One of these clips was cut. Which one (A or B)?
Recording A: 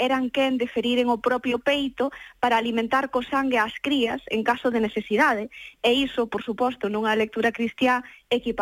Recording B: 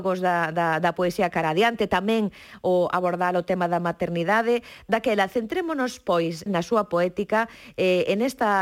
B